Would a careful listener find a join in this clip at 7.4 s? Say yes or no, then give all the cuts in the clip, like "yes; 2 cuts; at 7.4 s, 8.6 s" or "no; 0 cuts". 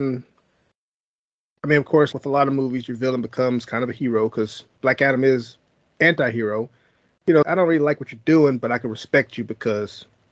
yes; 2 cuts; at 2.1 s, 7.4 s